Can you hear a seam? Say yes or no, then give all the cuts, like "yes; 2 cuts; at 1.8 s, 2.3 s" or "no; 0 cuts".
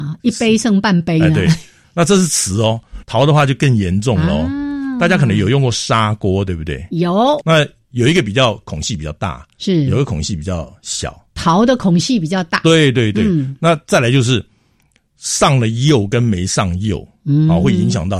yes; 2 cuts; at 3.0 s, 7.4 s